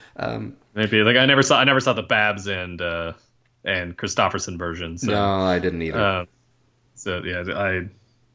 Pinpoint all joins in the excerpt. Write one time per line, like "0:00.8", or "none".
none